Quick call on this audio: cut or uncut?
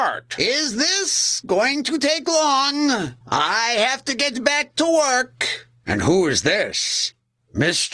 cut